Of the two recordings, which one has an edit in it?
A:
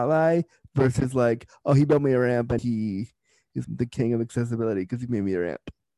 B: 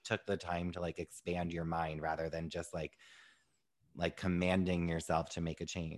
A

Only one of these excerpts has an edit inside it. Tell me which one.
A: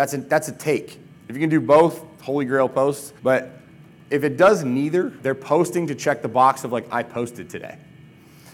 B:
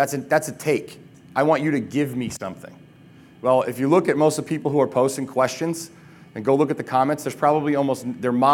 A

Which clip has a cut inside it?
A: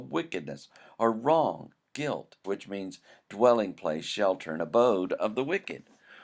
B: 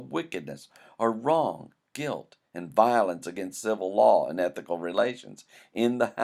A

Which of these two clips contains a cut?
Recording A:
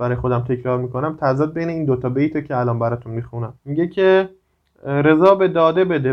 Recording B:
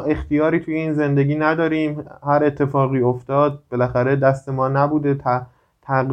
A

